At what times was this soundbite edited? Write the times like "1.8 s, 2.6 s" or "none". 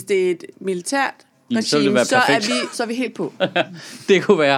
1.5 s, 2.7 s